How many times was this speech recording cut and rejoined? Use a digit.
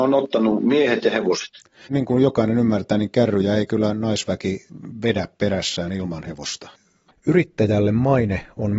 2